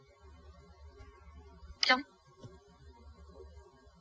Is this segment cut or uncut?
cut